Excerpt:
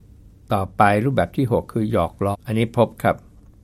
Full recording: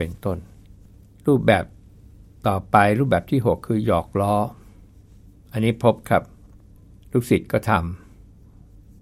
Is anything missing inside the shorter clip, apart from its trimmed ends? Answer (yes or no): yes